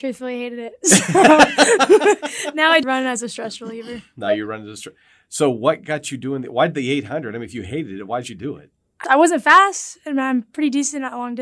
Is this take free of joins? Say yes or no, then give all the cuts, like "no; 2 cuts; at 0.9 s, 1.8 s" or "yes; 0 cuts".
no; 2 cuts; at 2.8 s, 9.0 s